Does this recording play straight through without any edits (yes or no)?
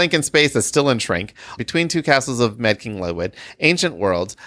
no